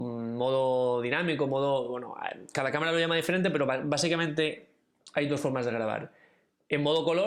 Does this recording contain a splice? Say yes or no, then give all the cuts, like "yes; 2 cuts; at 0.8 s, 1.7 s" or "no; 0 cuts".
no; 0 cuts